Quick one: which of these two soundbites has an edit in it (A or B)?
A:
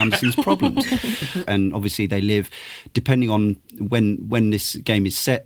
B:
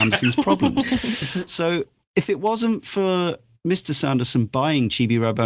A